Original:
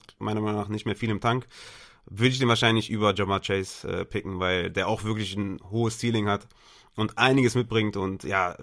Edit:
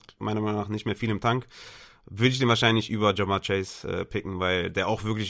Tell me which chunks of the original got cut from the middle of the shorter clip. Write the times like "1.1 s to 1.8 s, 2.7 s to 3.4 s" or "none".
none